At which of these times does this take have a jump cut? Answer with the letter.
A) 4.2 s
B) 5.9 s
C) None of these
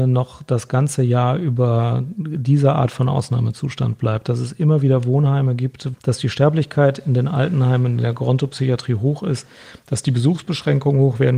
B